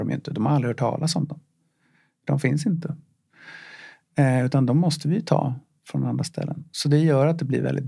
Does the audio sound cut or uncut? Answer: uncut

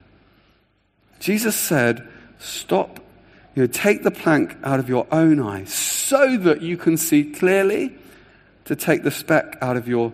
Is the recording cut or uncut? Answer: uncut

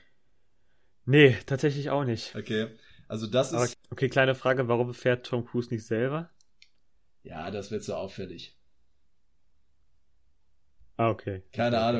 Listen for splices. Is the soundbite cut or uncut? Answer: cut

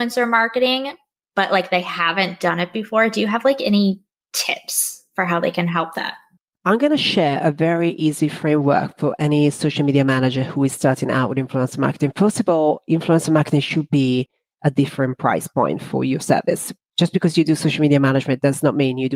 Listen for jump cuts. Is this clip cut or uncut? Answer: uncut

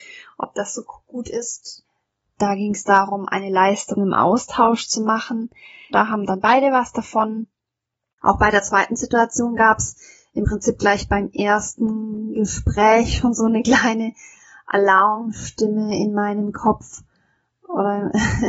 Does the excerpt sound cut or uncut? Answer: cut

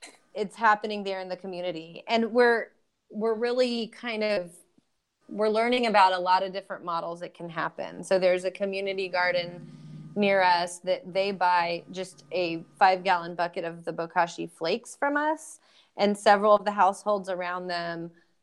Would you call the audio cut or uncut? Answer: uncut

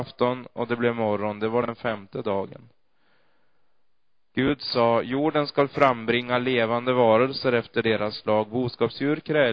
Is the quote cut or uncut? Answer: uncut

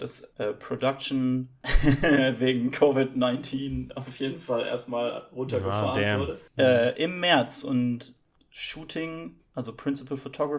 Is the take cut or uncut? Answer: uncut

